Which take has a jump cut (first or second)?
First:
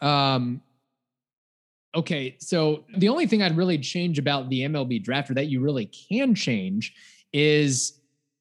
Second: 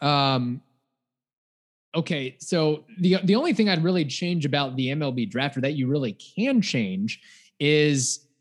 first